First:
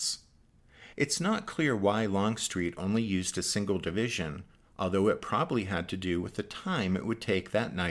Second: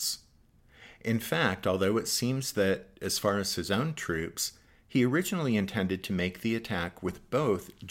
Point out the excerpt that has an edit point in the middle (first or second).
first